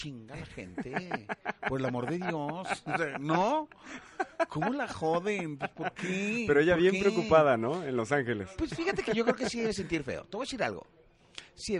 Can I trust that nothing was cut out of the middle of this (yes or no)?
yes